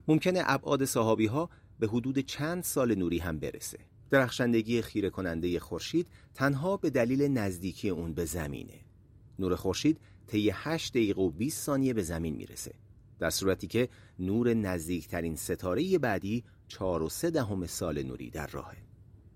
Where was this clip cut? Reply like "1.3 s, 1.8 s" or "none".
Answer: 4.0 s